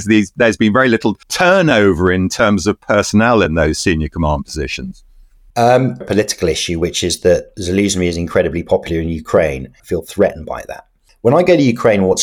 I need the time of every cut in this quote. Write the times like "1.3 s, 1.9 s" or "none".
1.2 s, 6.0 s, 9.8 s